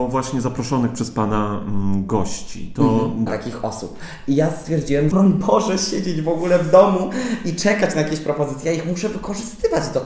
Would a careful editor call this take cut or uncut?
cut